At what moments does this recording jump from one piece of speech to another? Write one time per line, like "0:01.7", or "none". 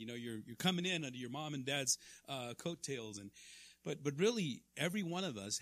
none